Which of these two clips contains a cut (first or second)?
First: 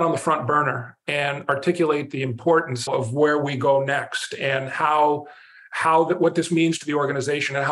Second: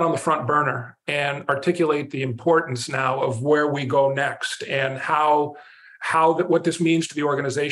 first